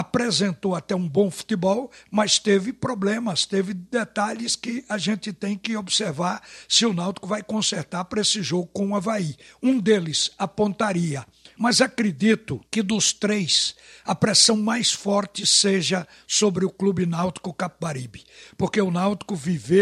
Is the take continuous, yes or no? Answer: no